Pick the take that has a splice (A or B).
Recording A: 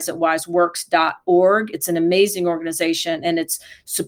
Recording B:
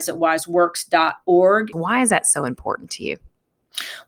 B